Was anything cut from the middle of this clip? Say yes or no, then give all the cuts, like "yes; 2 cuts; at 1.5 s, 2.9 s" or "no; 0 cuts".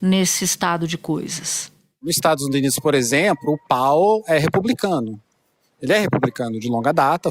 no; 0 cuts